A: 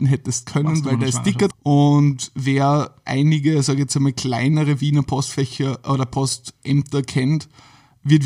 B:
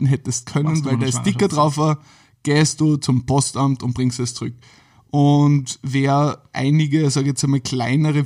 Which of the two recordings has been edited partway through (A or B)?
A